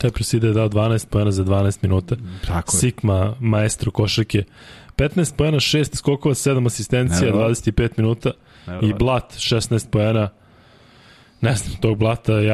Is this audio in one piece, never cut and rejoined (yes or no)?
yes